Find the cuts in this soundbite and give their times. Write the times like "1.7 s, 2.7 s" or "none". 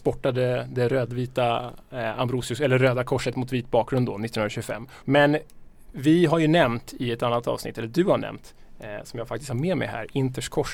5.0 s